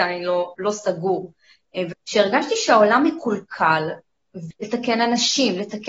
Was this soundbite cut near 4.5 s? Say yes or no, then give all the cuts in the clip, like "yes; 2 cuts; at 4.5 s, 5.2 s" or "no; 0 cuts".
yes; 2 cuts; at 1.9 s, 4.5 s